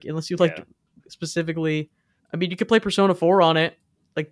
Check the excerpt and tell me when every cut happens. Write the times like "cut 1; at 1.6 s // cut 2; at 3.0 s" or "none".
cut 1; at 2.2 s